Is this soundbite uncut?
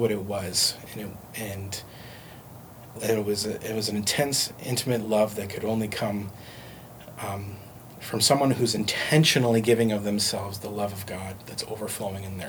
no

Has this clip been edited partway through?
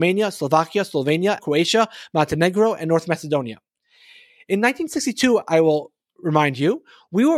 yes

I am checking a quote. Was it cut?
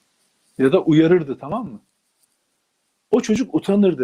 yes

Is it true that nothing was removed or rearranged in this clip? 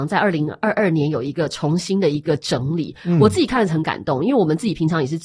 yes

